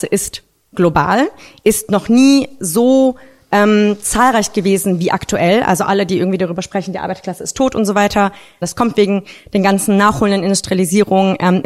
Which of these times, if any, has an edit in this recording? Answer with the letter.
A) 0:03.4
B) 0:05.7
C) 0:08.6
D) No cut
C